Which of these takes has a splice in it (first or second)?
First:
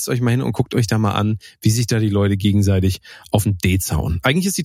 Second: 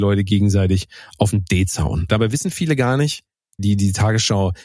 second